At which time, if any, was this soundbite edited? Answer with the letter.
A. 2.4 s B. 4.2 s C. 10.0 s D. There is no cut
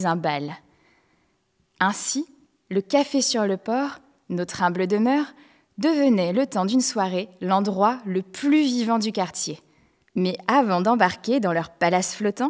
C